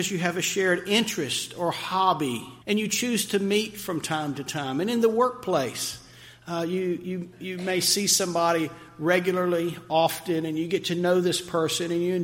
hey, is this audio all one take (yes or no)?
no